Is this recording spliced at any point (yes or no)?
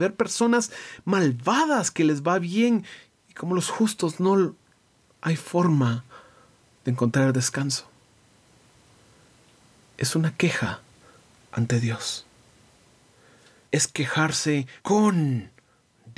yes